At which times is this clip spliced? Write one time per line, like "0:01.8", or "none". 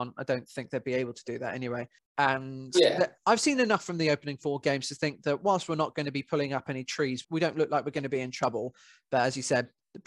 0:02.0
0:07.2